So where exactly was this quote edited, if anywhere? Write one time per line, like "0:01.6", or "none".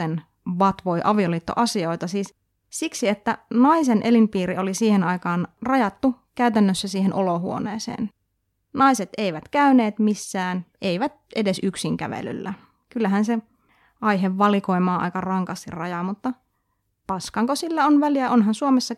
none